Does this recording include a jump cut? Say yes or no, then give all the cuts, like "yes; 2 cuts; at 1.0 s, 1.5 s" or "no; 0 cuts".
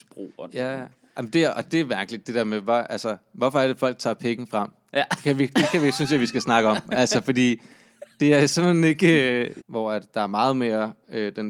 yes; 1 cut; at 9.6 s